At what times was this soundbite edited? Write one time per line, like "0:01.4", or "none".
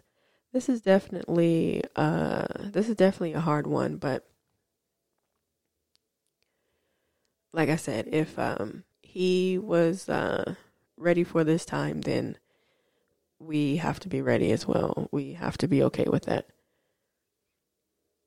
0:08.9